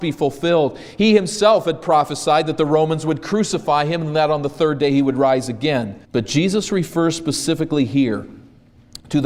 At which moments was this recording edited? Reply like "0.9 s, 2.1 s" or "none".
6.0 s

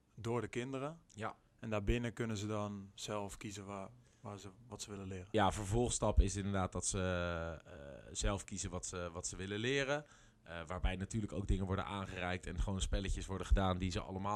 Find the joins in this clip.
none

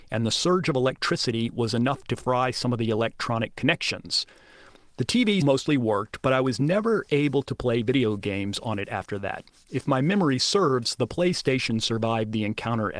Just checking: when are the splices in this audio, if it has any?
5.4 s

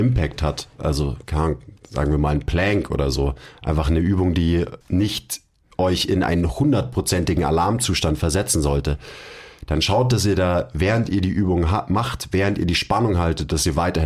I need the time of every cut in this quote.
4.8 s

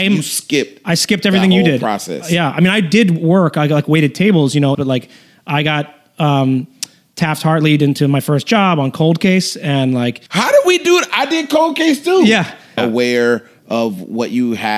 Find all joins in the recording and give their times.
4.7 s, 10.3 s, 12.8 s

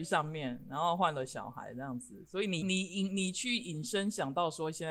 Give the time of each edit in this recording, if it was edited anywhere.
2.6 s

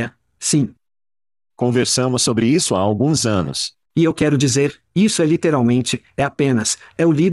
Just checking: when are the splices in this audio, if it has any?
3.9 s

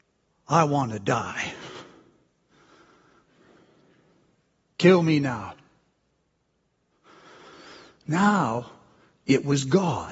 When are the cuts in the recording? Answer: none

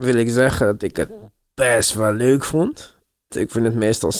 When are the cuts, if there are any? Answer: 3.3 s

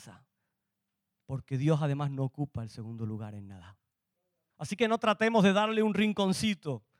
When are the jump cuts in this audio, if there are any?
4.5 s

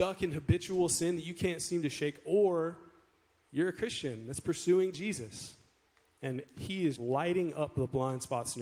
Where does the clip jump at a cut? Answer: 7.0 s

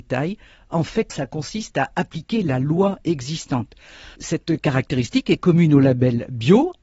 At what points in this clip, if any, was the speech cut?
1.1 s, 4.2 s

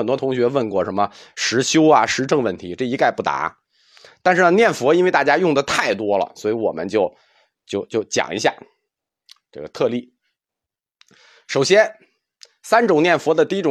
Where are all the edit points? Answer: none

